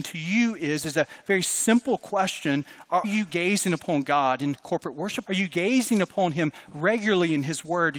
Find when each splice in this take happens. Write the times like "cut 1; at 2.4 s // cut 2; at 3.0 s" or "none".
cut 1; at 3.0 s // cut 2; at 5.2 s